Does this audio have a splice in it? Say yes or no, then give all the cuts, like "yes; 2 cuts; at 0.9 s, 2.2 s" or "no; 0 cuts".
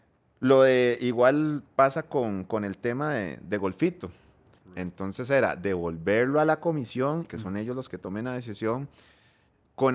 yes; 2 cuts; at 4.6 s, 7.3 s